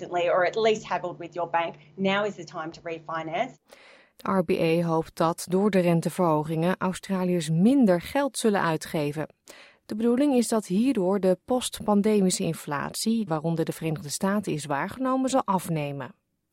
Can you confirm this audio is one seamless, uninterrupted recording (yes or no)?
no